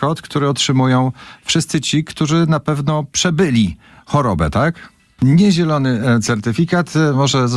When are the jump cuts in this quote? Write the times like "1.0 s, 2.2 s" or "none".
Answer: 5.2 s